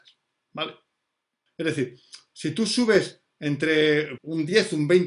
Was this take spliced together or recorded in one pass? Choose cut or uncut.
cut